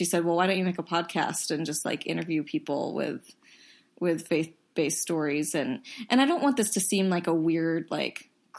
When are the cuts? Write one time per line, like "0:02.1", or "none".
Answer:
none